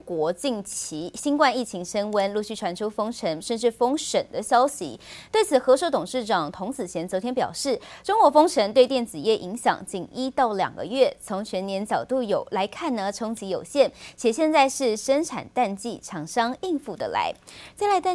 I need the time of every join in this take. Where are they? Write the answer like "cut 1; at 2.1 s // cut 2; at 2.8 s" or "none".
none